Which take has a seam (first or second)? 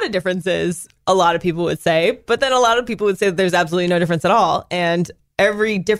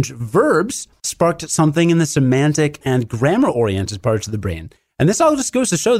second